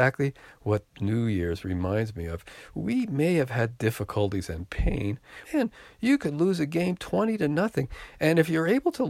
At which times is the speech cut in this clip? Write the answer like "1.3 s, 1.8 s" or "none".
5.4 s